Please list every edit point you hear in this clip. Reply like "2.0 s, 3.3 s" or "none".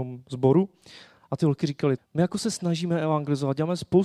2.0 s